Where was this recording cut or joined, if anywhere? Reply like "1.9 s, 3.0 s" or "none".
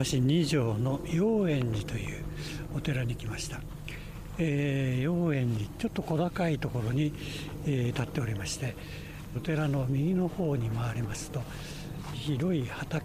9.3 s, 12.1 s